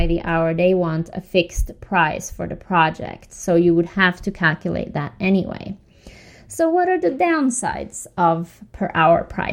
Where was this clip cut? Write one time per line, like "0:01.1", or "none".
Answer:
none